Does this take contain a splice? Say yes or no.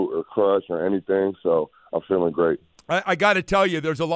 no